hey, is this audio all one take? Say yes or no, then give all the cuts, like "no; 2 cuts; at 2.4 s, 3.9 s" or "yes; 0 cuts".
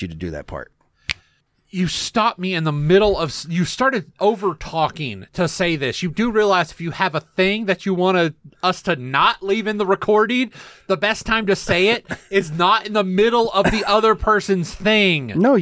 yes; 0 cuts